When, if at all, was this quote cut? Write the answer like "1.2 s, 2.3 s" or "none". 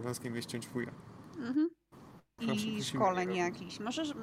2.4 s